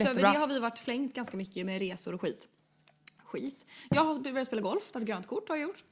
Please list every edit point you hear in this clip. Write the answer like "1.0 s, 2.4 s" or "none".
none